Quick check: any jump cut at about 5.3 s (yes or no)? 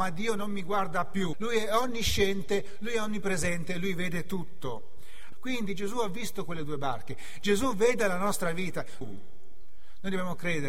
yes